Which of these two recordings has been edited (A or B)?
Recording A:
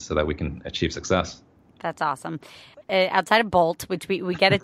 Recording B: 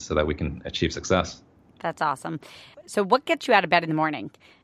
A